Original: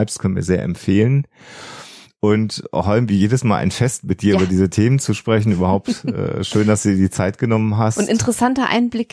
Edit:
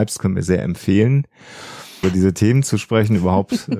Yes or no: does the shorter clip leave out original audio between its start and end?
yes